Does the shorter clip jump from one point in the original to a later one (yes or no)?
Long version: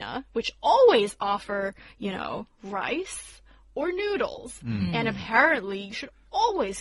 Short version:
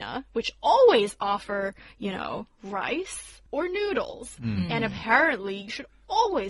yes